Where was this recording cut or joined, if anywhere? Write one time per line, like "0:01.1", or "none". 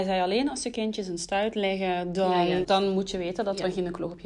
0:02.6